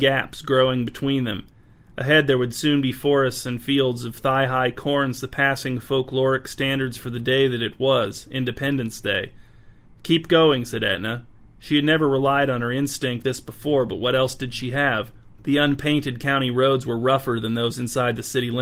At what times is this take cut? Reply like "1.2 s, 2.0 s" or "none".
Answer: 13.2 s, 15.4 s

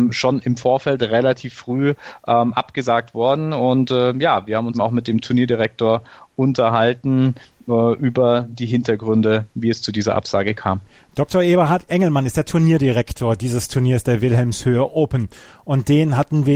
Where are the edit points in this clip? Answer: 4.7 s

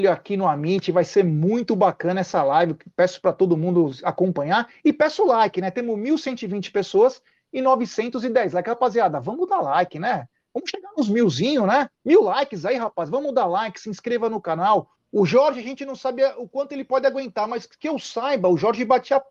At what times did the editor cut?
11.9 s, 14.9 s

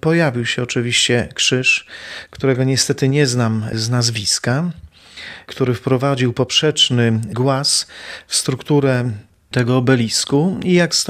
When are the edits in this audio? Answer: 2.3 s

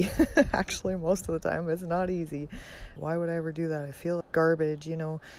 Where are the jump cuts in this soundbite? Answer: 3.0 s, 4.2 s

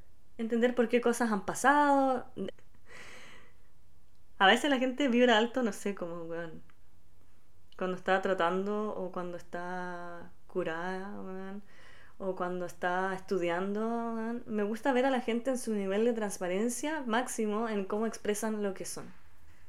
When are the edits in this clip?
2.5 s

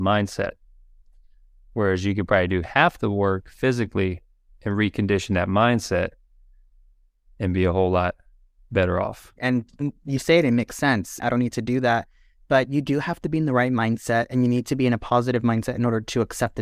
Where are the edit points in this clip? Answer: 9.4 s, 11.2 s

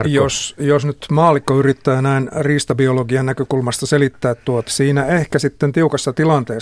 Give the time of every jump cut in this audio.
4.7 s

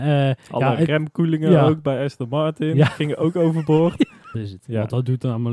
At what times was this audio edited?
4.3 s

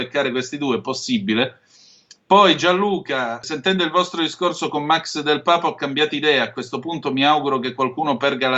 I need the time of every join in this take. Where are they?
3.4 s

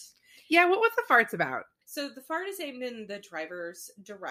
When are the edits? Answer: 1.8 s

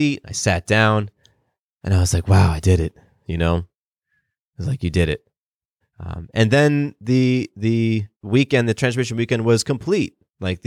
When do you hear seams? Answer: 5.8 s, 8.1 s

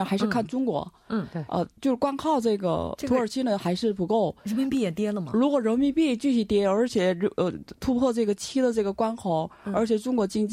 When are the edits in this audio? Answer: none

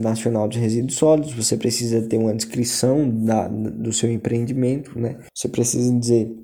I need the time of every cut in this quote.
5.3 s

